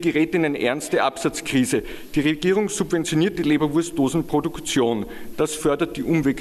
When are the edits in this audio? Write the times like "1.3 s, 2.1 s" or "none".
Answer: 5.3 s